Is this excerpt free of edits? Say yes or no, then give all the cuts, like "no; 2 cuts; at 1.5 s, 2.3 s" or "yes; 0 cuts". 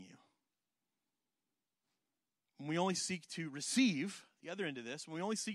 yes; 0 cuts